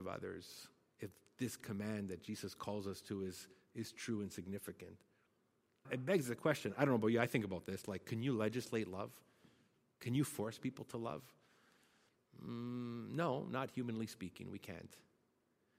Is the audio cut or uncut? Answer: cut